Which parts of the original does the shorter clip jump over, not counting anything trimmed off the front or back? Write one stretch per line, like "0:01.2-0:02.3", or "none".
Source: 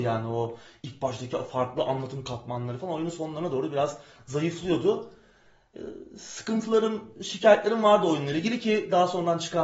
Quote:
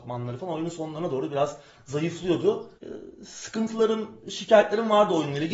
0:05.2-0:05.7

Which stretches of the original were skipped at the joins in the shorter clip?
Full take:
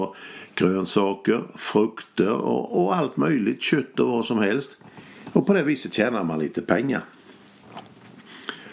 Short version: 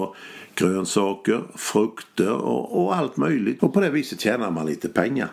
0:03.6-0:05.3

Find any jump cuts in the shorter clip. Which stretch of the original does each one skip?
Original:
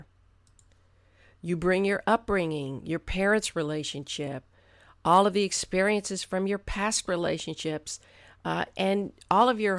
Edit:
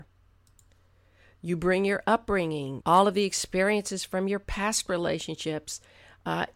0:02.8-0:05.0

